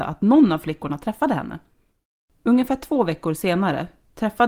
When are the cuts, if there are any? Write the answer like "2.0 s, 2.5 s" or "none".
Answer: 2.4 s